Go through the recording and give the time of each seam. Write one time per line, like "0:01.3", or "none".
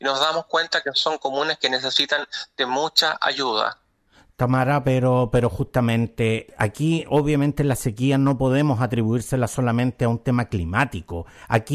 none